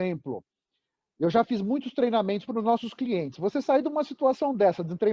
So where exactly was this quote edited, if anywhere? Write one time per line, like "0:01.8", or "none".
0:02.5